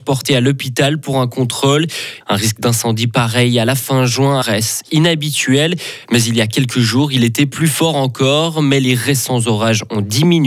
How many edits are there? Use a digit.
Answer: 3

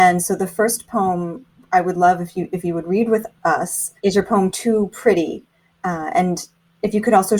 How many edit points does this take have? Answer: 1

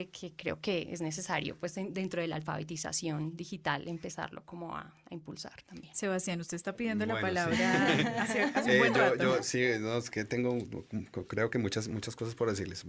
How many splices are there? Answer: 0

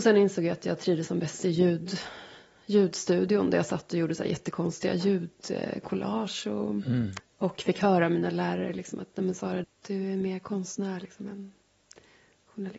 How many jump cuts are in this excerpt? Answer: 2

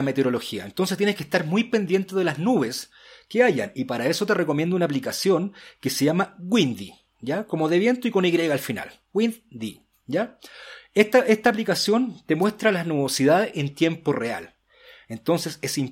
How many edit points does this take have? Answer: 0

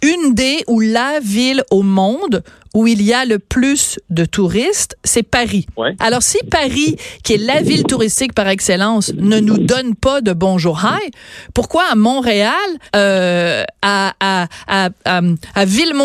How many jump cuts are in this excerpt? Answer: 2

